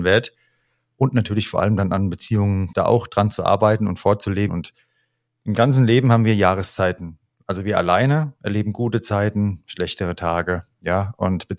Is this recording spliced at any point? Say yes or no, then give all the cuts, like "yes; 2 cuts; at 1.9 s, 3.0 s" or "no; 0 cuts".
yes; 2 cuts; at 2.7 s, 4.5 s